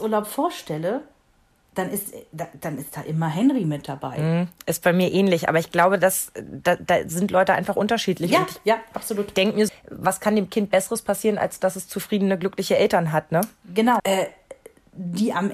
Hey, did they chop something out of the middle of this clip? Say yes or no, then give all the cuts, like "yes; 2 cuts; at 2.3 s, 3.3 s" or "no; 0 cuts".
yes; 2 cuts; at 9.7 s, 14.0 s